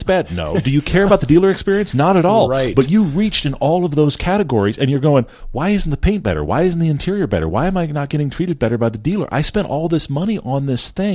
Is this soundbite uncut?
yes; 0 cuts

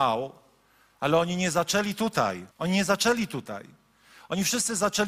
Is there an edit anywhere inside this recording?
yes; 1 cut; at 2.5 s

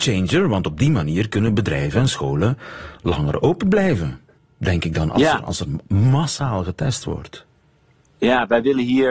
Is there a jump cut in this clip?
no; 0 cuts

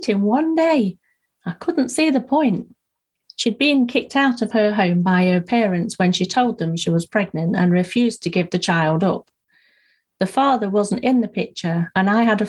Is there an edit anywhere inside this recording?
yes; 1 cut; at 3.2 s

